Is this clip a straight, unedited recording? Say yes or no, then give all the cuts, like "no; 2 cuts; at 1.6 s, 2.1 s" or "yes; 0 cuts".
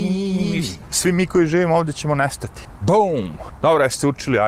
no; 1 cut; at 3.6 s